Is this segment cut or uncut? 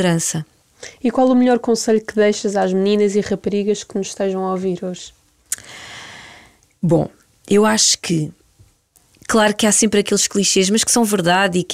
uncut